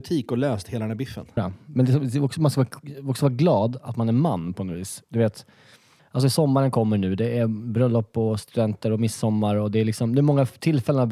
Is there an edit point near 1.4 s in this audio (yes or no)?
yes